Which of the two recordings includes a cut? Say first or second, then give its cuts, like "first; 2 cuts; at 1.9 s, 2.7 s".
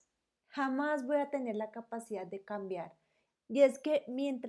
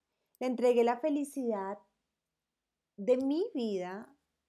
first; 1 cut; at 3.3 s